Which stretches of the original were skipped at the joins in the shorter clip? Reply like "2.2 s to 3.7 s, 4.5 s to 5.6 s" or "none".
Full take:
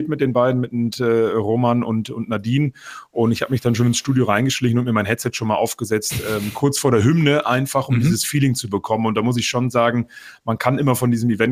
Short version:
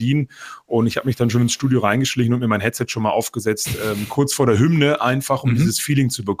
none